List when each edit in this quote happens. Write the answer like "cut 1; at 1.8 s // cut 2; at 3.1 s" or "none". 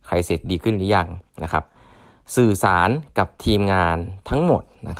none